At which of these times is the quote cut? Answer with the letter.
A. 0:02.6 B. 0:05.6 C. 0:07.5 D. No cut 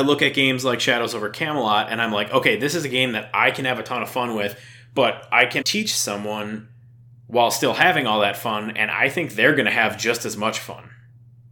B